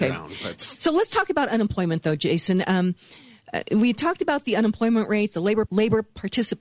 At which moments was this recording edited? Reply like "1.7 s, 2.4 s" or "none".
5.7 s